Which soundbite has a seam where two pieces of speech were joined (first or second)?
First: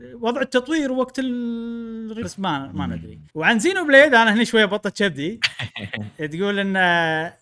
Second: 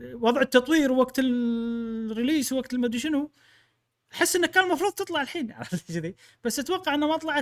first